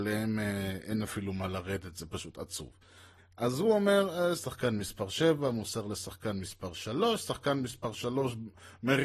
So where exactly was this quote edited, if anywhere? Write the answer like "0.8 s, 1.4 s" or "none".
3.2 s, 4.4 s